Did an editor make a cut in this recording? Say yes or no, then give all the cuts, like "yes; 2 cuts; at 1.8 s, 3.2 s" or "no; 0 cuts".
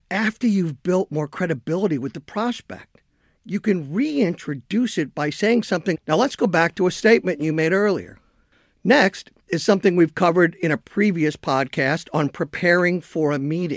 yes; 1 cut; at 5.9 s